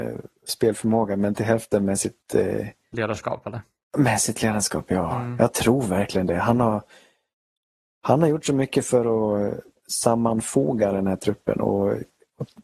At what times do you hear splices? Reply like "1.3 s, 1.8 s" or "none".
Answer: none